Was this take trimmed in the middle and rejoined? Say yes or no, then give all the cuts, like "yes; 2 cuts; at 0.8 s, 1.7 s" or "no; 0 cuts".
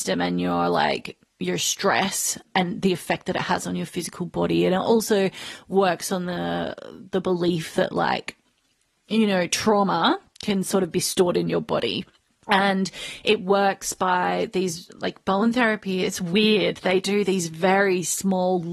no; 0 cuts